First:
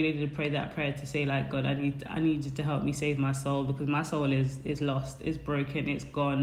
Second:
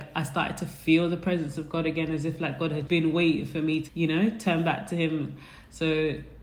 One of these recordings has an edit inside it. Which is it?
second; 2 cuts; at 2.9 s, 3.9 s

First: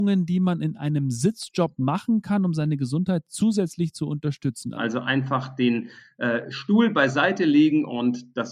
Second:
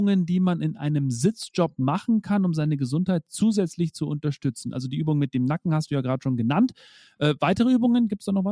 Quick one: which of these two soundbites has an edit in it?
first; 1 cut; at 4.7 s

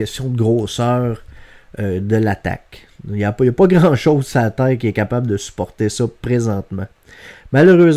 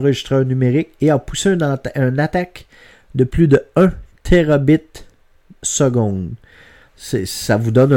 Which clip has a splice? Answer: second; 1 cut; at 6.9 s

